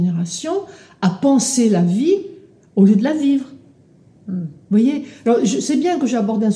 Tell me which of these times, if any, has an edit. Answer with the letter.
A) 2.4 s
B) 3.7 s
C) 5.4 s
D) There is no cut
D